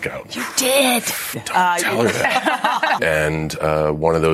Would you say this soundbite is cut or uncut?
cut